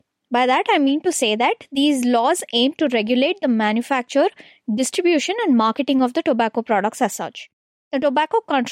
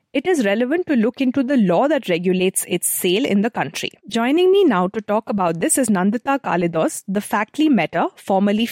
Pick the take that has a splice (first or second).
second